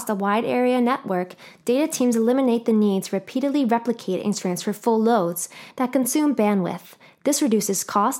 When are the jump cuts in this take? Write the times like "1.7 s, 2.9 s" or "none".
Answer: 5.7 s